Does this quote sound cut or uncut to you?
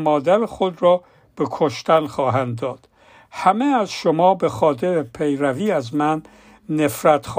uncut